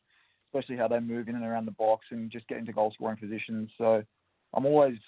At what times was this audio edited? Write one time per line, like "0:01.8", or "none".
none